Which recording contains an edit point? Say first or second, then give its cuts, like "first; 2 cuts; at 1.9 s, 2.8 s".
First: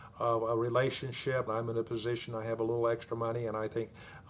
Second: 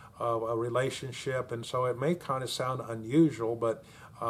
first; 1 cut; at 1.5 s